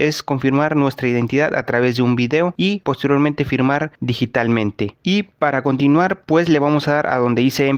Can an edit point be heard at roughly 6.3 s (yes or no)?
no